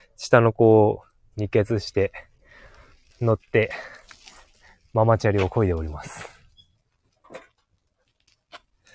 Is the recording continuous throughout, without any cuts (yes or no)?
yes